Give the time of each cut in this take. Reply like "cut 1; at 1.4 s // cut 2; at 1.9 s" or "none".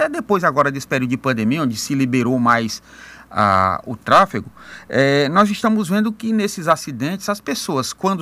none